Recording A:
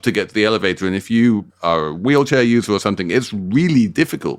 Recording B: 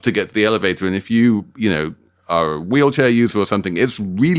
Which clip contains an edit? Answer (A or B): A